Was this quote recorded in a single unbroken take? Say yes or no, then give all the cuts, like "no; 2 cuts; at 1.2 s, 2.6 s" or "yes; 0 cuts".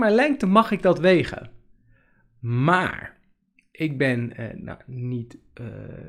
yes; 0 cuts